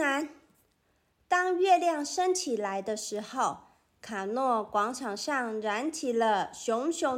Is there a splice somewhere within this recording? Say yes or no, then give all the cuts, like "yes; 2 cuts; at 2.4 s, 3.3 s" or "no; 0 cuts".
no; 0 cuts